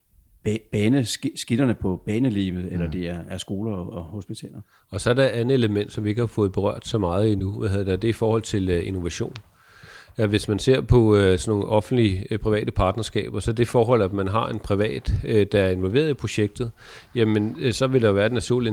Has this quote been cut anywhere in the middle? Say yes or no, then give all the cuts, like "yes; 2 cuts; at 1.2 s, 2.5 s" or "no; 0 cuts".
no; 0 cuts